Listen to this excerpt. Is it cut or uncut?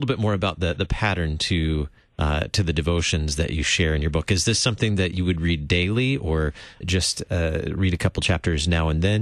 cut